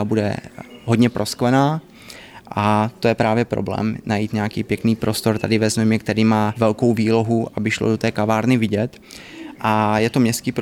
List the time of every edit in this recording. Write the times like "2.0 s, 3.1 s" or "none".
6.5 s, 9.5 s